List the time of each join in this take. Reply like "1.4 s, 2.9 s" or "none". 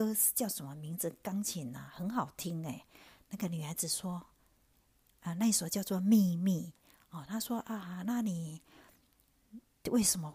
none